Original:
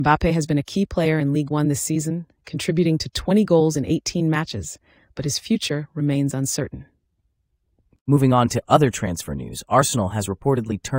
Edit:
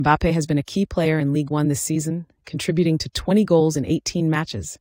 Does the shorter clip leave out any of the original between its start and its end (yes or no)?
no